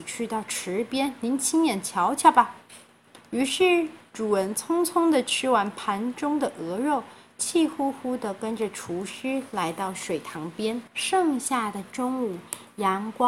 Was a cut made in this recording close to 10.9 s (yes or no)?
yes